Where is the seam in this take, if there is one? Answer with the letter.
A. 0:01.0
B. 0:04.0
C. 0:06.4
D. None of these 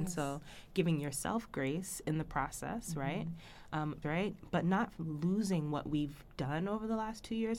B